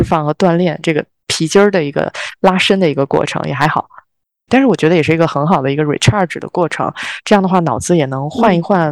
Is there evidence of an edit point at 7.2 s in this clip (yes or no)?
no